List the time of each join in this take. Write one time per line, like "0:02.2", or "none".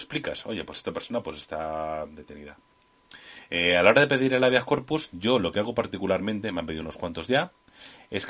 none